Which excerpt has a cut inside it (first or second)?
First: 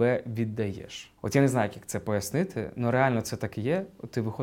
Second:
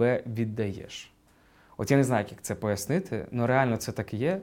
first